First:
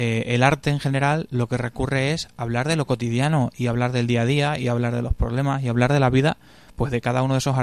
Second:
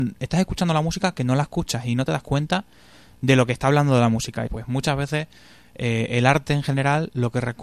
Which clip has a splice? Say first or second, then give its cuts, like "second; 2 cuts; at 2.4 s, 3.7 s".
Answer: second; 1 cut; at 4.5 s